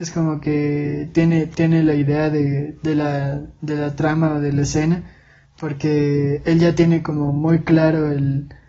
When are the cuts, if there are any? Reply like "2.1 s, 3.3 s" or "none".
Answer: 5.4 s